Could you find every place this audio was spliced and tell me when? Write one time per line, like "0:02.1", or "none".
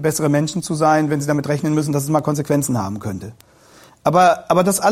none